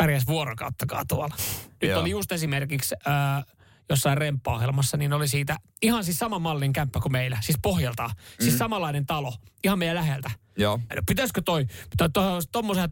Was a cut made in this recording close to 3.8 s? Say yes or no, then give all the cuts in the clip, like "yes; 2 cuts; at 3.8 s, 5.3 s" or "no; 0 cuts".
no; 2 cuts; at 1.8 s, 10.9 s